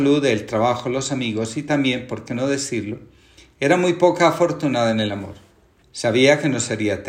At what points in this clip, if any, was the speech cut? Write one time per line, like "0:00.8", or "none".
0:05.8